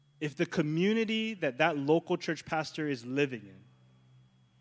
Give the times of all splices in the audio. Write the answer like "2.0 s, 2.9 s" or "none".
none